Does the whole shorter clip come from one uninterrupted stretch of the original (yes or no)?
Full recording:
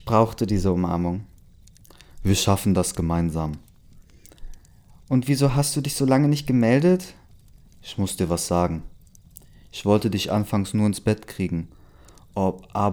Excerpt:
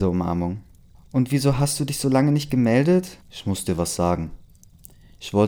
no